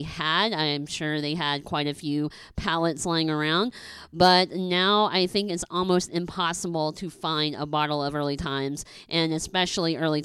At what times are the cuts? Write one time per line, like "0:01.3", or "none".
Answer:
none